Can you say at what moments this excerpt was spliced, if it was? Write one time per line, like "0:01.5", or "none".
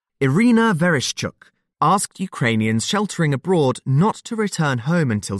0:01.7